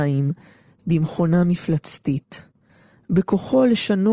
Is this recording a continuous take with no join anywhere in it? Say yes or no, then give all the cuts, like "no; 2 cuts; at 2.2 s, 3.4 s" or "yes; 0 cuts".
yes; 0 cuts